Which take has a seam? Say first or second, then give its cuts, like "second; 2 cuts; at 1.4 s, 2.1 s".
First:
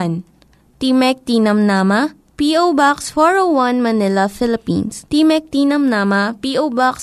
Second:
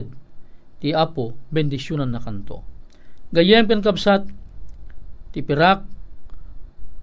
first; 1 cut; at 5.1 s